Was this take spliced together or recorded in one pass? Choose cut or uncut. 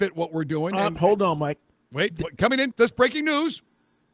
cut